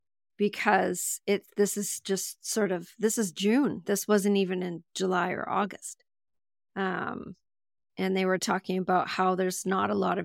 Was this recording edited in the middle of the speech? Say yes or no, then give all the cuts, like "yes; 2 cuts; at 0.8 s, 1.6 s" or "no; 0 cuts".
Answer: no; 0 cuts